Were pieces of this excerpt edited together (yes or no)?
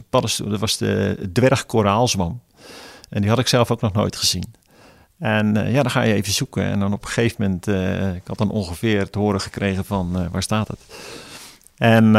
no